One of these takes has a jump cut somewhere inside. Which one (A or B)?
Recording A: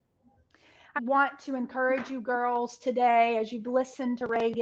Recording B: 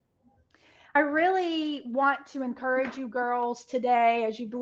A